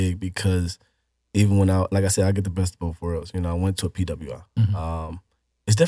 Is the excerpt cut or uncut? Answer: uncut